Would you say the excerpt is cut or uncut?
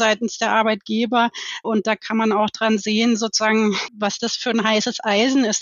cut